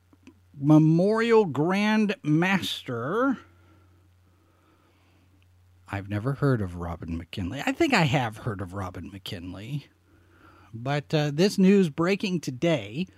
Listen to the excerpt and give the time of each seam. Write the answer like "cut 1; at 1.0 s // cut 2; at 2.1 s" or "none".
none